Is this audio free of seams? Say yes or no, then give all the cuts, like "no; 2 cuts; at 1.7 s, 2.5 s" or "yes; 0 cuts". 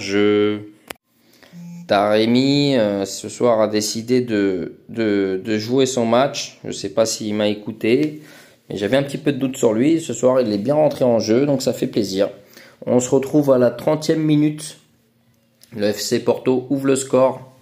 yes; 0 cuts